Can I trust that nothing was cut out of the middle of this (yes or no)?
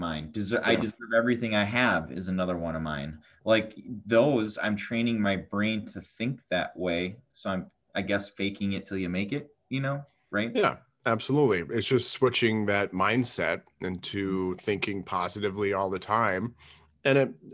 yes